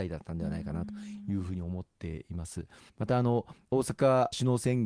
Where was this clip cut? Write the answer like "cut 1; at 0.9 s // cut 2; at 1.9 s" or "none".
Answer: cut 1; at 2.9 s